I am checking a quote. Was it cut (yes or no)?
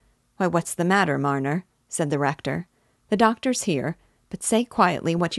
no